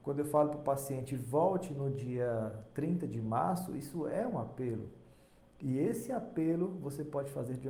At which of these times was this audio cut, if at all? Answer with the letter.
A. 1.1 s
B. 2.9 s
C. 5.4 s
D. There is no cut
C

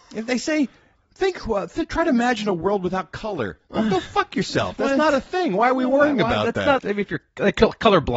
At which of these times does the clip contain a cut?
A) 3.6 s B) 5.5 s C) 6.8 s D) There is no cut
C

